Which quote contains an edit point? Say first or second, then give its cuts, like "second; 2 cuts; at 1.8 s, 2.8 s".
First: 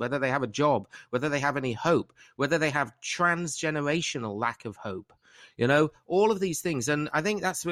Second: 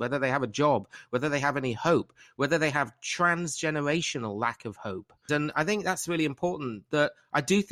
second; 1 cut; at 5.3 s